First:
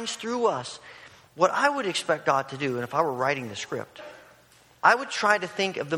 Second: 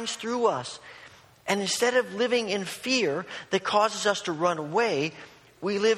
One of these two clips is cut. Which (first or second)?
first